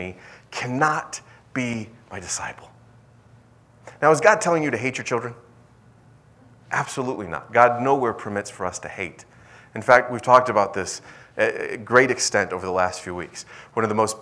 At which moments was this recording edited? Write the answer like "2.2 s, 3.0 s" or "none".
none